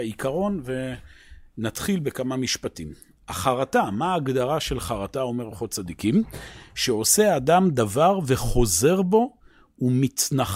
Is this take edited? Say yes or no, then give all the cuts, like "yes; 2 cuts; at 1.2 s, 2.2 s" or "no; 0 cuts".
no; 0 cuts